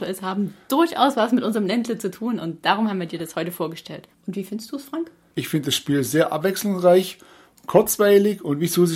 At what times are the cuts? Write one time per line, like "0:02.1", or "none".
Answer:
0:04.1